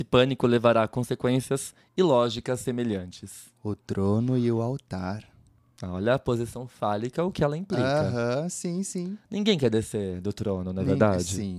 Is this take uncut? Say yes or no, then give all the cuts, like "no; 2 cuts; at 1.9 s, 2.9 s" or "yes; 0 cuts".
yes; 0 cuts